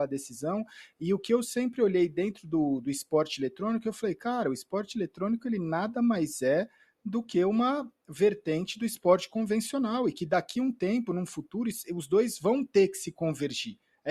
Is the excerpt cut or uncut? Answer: uncut